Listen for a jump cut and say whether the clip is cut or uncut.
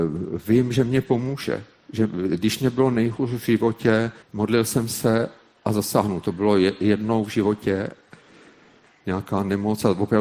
cut